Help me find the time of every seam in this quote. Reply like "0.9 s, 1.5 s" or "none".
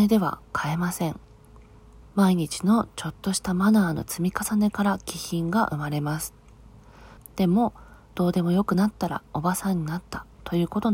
2.0 s, 7.2 s